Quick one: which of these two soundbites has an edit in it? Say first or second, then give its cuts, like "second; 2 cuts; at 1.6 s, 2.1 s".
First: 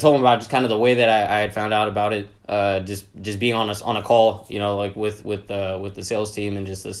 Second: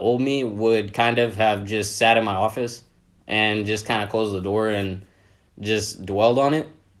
first; 1 cut; at 2.4 s